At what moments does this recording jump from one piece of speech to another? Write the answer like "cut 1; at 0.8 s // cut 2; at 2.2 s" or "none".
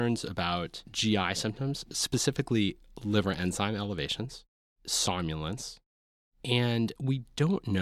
none